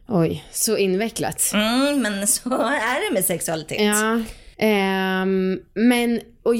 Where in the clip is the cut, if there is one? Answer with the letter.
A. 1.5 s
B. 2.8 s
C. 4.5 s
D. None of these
C